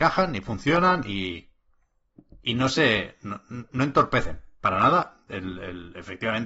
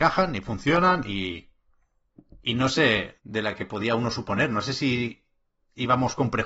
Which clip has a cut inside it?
second; 1 cut; at 3.2 s

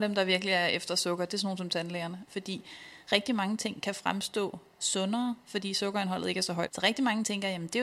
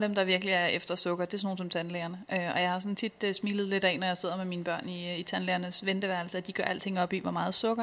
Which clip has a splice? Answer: first; 2 cuts; at 2.3 s, 6.7 s

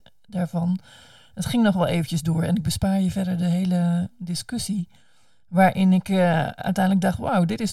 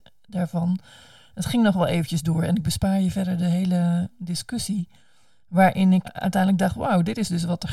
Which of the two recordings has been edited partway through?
second; 1 cut; at 6.0 s

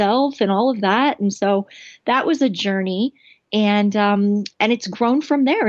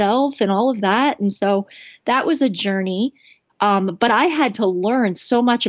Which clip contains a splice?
second; 1 cut; at 3.5 s

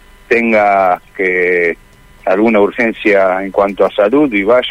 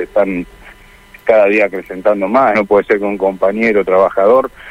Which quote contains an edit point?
second; 1 cut; at 2.6 s

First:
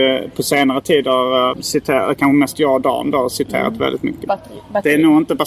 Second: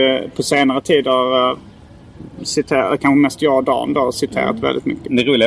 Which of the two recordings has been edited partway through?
first; 2 cuts; at 1.5 s, 4.3 s

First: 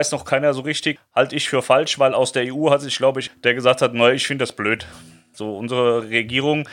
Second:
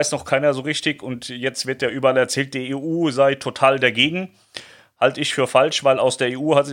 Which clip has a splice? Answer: first; 3 cuts; at 1.0 s, 3.3 s, 5.3 s

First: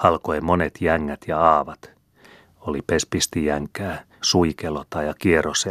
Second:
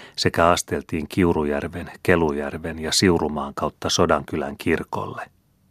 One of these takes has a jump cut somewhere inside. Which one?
first; 1 cut; at 4.2 s

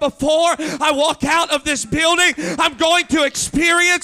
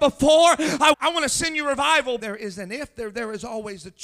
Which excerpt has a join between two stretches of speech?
second; 2 cuts; at 0.9 s, 2.2 s

